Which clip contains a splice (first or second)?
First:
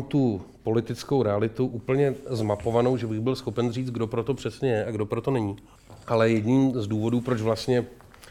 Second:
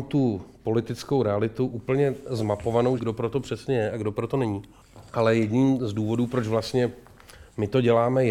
second